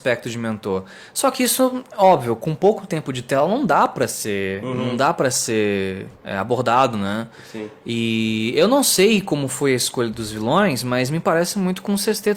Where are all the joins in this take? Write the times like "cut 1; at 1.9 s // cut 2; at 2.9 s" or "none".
cut 1; at 6.1 s // cut 2; at 10.1 s